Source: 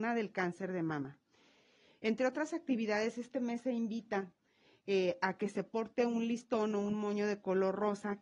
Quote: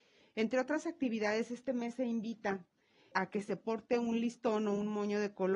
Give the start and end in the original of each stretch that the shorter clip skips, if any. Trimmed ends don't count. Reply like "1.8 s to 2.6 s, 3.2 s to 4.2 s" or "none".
4.8 s to 5.2 s